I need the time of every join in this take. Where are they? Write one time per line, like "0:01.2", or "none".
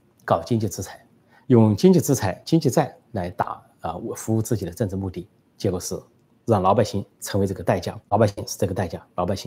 0:08.0